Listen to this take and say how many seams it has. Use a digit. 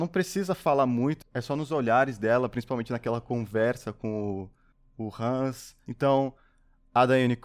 1